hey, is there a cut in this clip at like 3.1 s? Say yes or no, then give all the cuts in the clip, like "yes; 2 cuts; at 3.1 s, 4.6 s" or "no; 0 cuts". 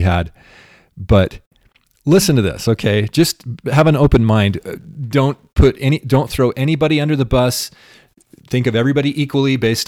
no; 0 cuts